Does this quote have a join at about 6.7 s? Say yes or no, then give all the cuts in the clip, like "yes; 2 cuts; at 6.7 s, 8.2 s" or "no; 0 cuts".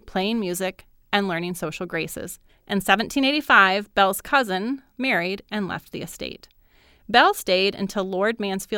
no; 2 cuts; at 2.5 s, 4.9 s